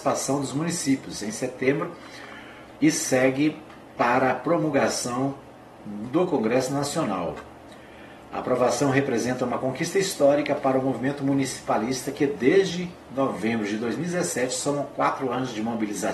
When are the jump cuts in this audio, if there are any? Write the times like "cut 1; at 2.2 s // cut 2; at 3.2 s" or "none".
none